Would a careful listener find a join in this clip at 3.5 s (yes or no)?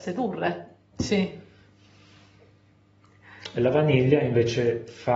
no